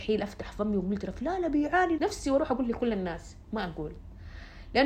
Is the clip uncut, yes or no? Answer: no